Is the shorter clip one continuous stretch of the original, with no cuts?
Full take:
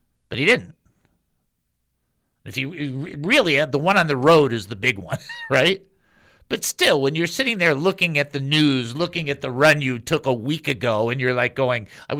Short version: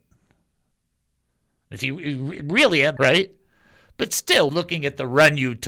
no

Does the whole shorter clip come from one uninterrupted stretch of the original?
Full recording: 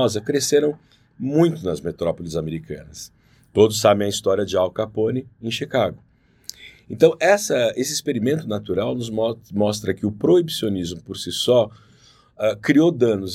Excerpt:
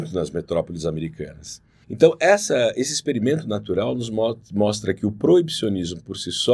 no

